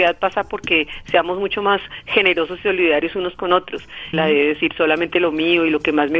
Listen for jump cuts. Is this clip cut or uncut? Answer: cut